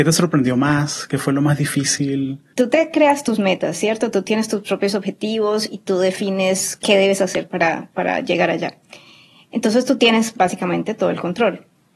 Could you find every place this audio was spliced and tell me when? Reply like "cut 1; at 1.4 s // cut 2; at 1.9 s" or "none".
cut 1; at 2.5 s